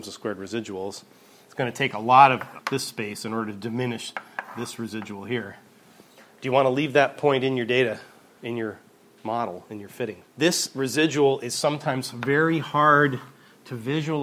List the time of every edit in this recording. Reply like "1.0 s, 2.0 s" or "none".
2.6 s, 10.2 s